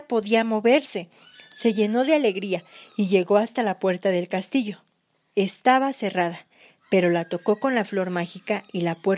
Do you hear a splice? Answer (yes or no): no